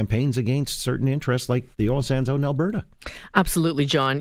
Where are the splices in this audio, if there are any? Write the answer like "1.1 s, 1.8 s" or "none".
1.7 s